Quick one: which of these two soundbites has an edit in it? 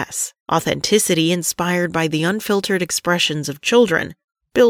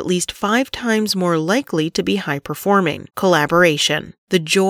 second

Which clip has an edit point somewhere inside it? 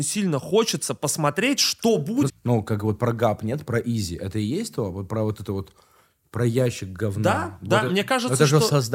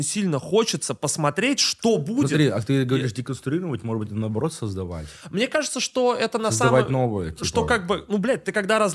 first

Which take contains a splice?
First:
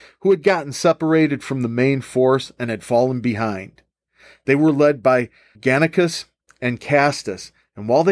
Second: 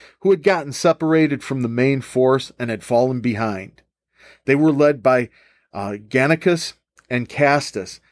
first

